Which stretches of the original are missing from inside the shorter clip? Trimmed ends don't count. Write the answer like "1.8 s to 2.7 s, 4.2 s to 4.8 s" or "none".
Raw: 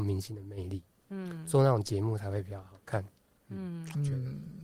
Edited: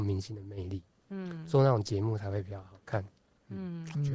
none